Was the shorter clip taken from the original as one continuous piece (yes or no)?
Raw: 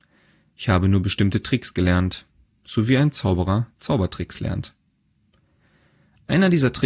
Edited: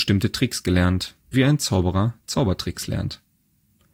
no